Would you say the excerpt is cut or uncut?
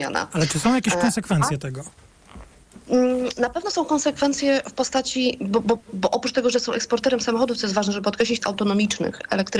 cut